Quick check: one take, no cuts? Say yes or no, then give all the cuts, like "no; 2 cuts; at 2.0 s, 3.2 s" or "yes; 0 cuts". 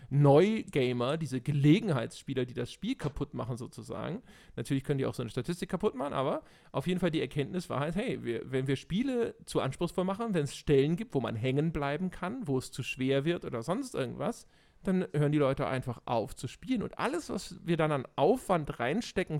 yes; 0 cuts